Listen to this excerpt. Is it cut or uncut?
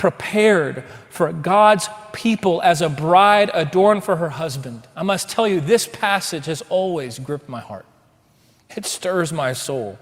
uncut